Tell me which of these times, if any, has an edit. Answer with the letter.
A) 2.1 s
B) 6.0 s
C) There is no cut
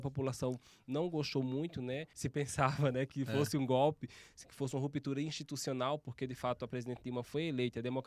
A